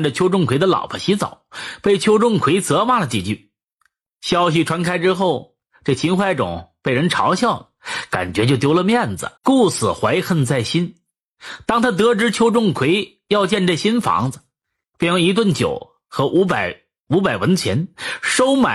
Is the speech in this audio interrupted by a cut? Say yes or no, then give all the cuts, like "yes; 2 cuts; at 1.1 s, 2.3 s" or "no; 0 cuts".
yes; 1 cut; at 9.4 s